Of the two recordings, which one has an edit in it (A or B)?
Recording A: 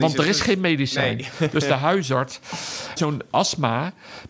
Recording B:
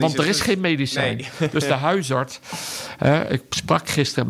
A